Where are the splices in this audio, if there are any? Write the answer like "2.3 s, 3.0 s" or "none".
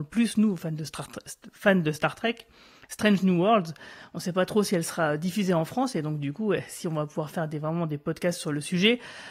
none